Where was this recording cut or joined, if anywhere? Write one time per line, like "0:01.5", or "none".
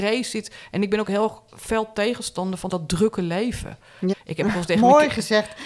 0:02.7
0:04.1